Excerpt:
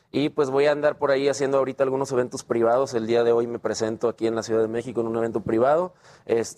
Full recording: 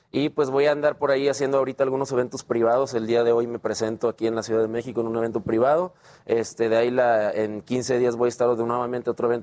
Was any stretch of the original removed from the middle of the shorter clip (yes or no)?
no